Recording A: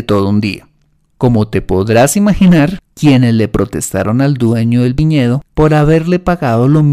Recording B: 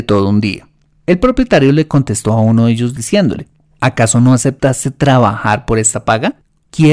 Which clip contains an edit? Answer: A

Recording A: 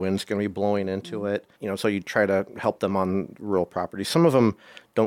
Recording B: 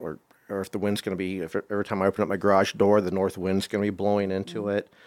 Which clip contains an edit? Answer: A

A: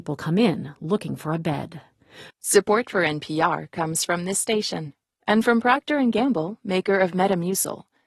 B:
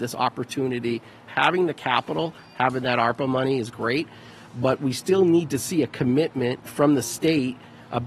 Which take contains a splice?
A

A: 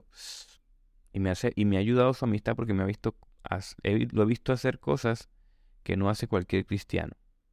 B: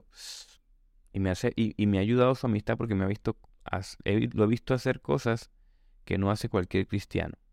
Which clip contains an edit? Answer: A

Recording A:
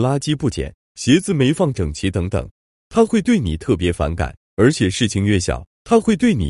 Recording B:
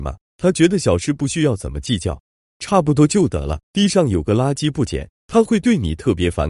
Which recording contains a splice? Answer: B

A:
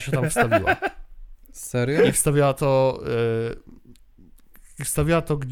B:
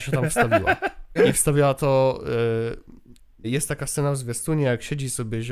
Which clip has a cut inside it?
B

